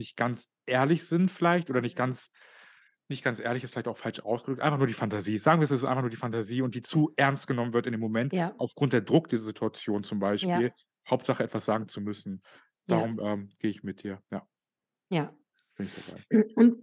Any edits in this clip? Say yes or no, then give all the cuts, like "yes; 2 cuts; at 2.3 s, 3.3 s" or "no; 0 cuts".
no; 0 cuts